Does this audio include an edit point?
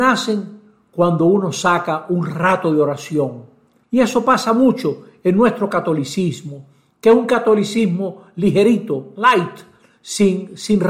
yes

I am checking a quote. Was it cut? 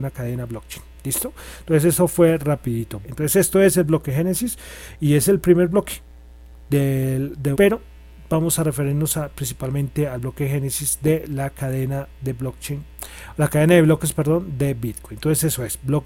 yes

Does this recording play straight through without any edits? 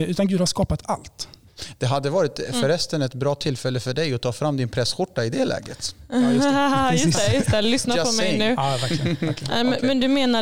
yes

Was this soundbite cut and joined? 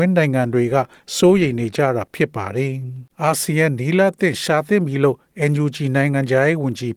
yes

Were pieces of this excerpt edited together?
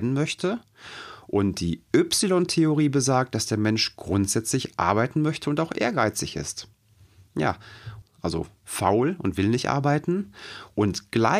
yes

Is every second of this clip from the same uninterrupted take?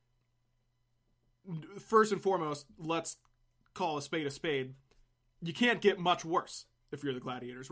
yes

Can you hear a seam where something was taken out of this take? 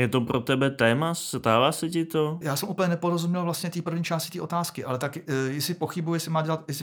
yes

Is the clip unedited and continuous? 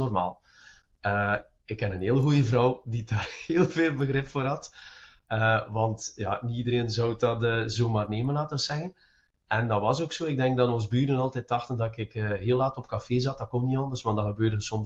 yes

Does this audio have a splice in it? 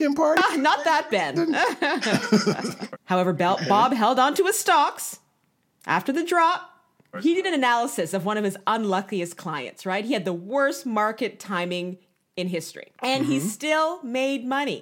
yes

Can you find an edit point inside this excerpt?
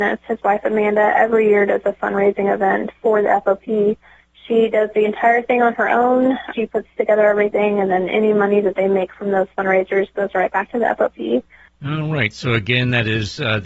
yes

